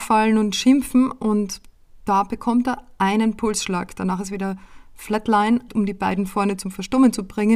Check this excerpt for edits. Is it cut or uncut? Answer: cut